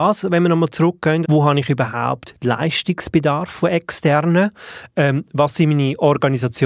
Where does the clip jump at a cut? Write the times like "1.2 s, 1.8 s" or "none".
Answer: 1.2 s